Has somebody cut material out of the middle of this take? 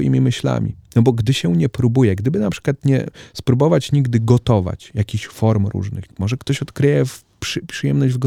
yes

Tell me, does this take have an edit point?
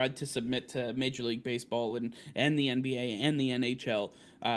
no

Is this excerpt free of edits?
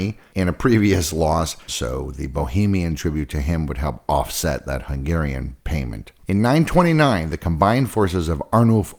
no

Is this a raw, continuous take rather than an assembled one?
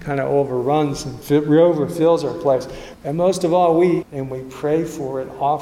no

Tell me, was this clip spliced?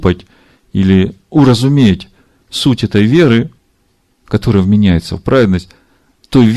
no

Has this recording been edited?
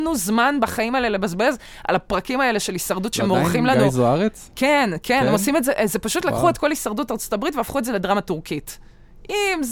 no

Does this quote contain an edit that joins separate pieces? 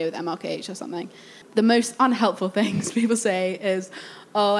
yes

